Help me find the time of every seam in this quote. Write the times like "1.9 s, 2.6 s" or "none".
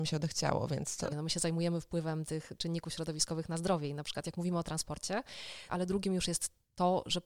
1.1 s, 5.7 s